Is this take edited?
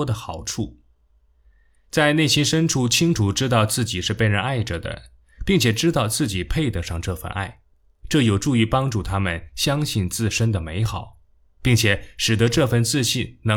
no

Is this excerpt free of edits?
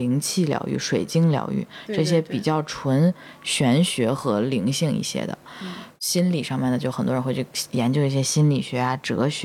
yes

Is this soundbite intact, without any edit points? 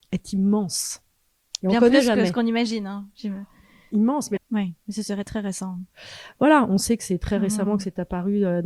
no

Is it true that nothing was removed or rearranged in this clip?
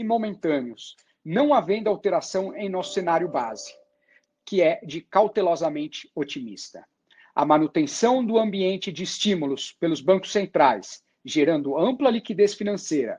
yes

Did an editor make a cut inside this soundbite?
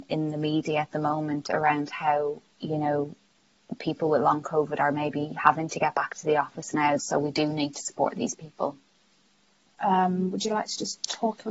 yes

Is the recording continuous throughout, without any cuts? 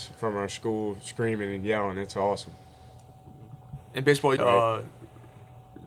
no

